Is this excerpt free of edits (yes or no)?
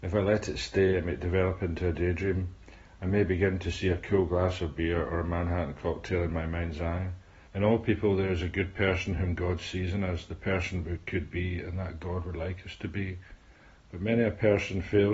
no